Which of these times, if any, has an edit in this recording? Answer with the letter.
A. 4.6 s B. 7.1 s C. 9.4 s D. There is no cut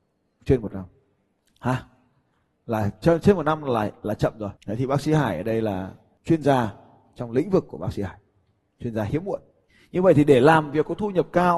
A